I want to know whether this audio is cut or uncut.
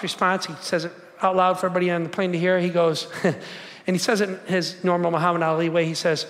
uncut